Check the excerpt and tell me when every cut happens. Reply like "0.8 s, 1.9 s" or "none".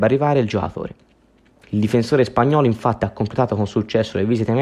1.6 s